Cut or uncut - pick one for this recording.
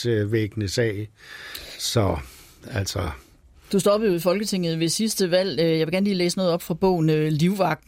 uncut